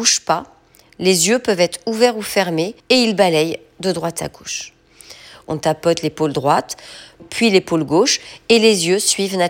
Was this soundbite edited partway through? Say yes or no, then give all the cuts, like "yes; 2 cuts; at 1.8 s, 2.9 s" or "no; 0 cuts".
yes; 3 cuts; at 2.8 s, 5.4 s, 7.2 s